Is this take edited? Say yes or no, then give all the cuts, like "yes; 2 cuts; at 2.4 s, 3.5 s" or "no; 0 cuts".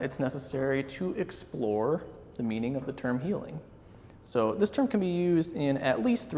no; 0 cuts